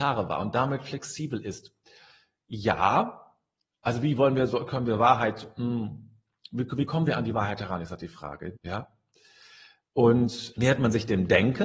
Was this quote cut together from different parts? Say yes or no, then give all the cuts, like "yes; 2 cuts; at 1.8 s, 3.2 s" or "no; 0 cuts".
yes; 2 cuts; at 8.5 s, 10.5 s